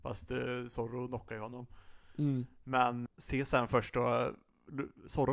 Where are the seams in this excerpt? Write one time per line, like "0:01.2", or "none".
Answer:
0:03.1